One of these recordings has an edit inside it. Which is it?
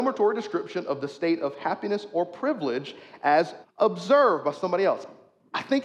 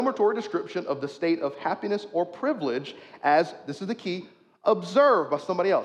first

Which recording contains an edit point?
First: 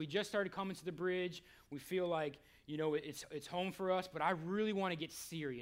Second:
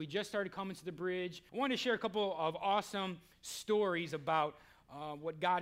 second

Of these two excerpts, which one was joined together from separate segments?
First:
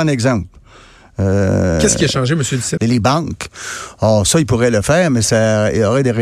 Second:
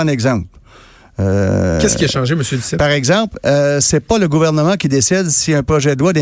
first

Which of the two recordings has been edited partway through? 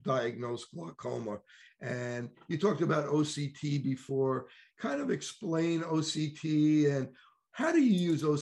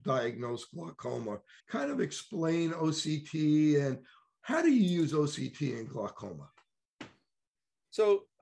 second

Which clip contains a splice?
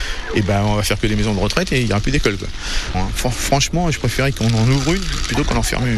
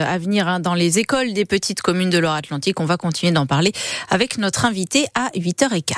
first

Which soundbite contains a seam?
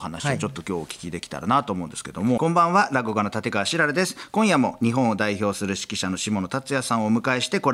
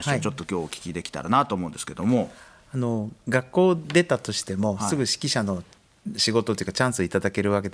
first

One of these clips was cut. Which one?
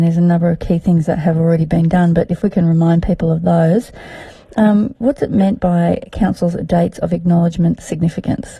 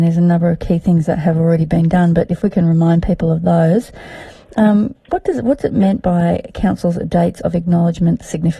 first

